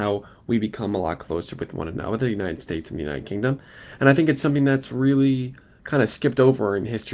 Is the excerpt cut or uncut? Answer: uncut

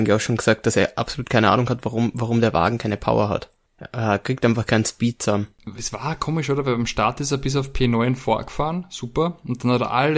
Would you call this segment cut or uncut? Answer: uncut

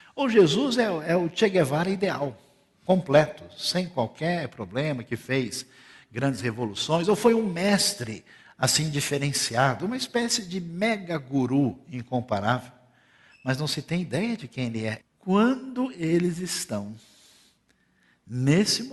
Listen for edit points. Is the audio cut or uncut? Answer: cut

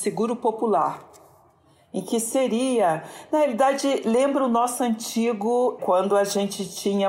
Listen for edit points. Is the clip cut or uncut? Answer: uncut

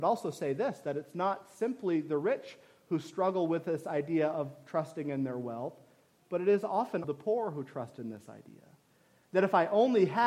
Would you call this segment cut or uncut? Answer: cut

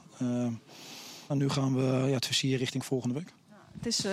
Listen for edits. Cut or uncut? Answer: cut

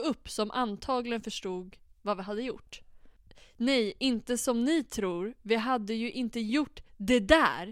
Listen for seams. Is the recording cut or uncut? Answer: uncut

